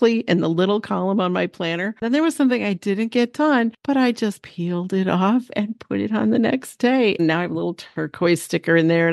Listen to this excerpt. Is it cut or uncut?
cut